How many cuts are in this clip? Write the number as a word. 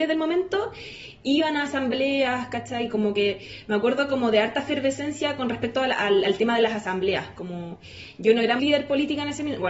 one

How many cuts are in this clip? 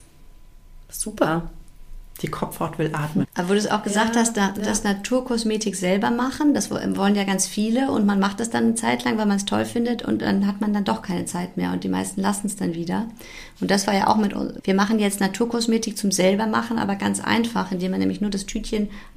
two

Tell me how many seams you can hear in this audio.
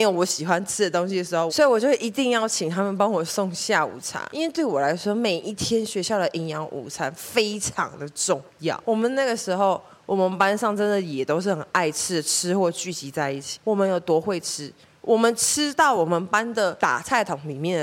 one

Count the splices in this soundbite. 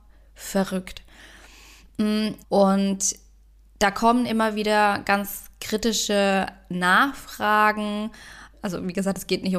two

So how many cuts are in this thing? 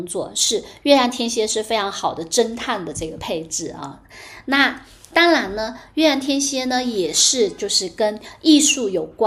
zero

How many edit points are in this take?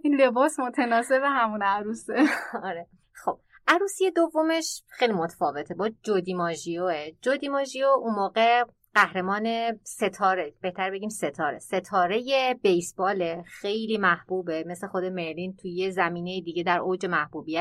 zero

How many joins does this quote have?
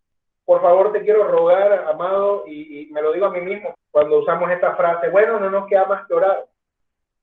one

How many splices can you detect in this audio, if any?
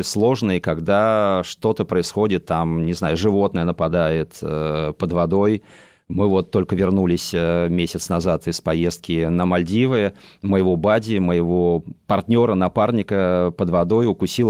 zero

